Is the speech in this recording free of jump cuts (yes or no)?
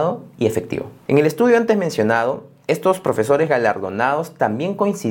no